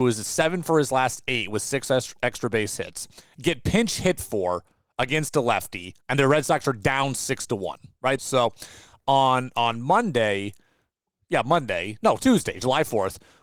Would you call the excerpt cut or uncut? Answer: cut